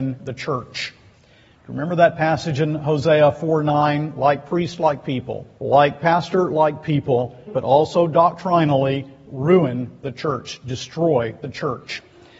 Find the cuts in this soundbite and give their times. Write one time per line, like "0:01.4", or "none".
0:05.6
0:07.5